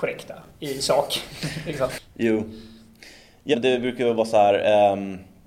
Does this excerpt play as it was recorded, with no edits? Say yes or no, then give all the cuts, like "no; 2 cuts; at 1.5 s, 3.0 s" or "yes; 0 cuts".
no; 1 cut; at 3.5 s